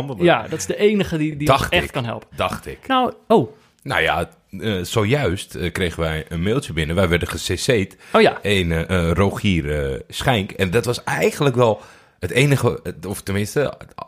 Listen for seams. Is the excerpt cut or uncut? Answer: uncut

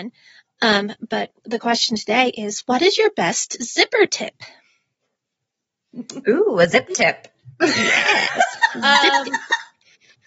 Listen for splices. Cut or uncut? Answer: uncut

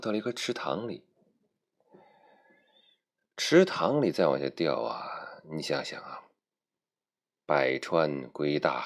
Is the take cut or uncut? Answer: uncut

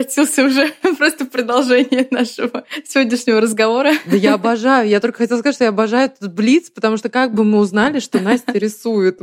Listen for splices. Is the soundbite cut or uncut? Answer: uncut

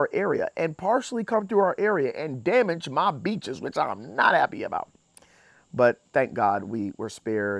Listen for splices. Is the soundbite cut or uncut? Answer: uncut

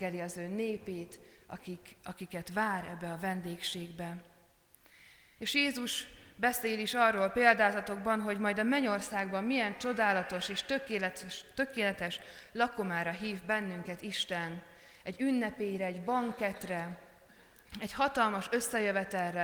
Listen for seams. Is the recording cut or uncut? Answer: cut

